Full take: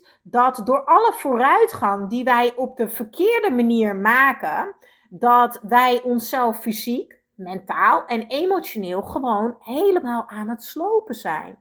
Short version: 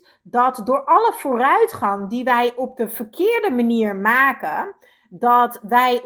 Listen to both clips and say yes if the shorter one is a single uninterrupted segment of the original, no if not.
yes